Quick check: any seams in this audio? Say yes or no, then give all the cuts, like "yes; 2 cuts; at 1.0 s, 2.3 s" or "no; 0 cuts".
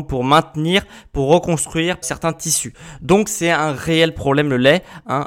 yes; 1 cut; at 2.0 s